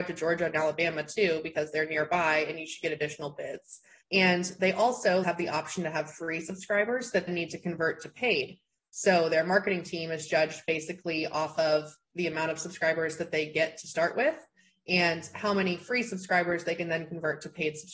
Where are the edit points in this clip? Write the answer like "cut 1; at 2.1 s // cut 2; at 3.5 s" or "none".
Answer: cut 1; at 4.0 s // cut 2; at 5.2 s // cut 3; at 7.3 s